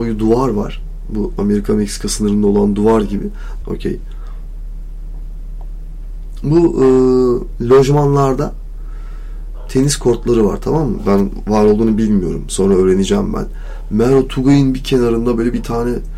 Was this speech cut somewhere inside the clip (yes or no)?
yes